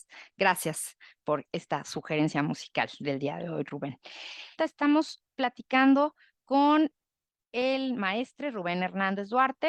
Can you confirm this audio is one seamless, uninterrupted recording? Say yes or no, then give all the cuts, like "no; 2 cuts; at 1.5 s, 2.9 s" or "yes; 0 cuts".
no; 1 cut; at 4.6 s